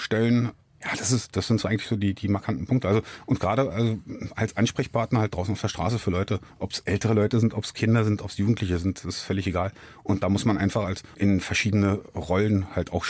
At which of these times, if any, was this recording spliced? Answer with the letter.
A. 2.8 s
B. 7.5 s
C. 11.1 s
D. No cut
C